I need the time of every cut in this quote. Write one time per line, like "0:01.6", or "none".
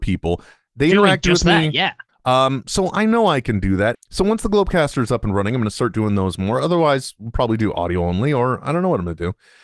0:02.1
0:03.9